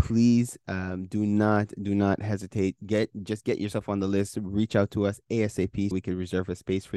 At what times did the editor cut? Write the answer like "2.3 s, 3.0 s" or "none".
5.9 s